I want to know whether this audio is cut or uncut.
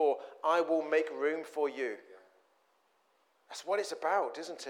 uncut